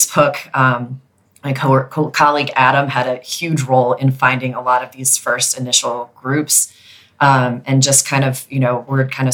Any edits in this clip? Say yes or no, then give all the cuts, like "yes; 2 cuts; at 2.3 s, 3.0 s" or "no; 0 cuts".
no; 0 cuts